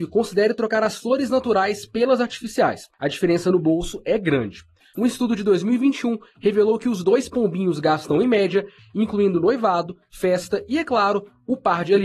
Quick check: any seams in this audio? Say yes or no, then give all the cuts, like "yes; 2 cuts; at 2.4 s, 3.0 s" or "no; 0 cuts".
yes; 2 cuts; at 4.9 s, 8.8 s